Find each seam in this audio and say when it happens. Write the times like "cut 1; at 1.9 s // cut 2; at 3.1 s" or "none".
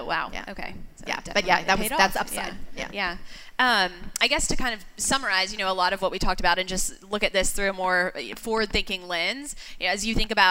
none